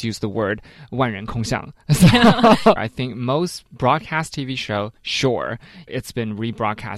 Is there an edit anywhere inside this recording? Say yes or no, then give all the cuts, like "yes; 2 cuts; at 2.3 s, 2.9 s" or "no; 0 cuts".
yes; 2 cuts; at 2.8 s, 5.9 s